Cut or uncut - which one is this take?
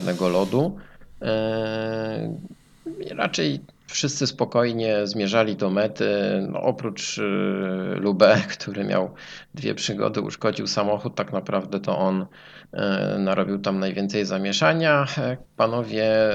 cut